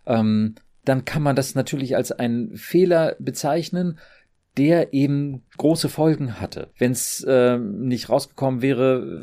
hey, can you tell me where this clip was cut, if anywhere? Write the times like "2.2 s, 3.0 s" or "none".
6.7 s